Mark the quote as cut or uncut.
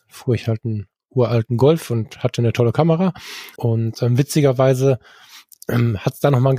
cut